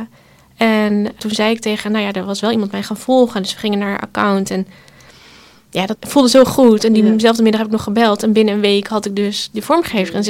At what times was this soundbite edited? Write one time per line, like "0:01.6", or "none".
0:05.9